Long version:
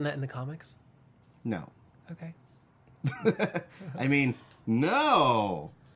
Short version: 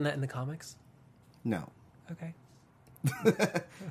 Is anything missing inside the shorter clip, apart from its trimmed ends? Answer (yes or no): no